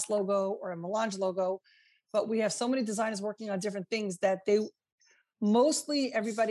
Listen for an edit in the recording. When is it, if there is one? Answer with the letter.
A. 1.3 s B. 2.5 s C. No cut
C